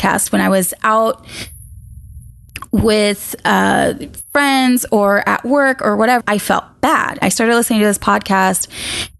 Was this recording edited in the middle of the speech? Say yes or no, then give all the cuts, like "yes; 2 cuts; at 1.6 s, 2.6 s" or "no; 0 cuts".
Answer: yes; 2 cuts; at 6.2 s, 7.2 s